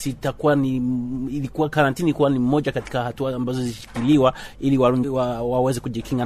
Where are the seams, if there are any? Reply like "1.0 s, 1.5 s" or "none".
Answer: 5.0 s